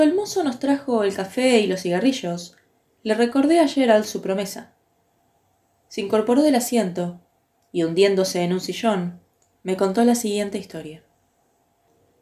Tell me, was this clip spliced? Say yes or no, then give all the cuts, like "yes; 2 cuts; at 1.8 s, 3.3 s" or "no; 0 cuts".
yes; 1 cut; at 7.7 s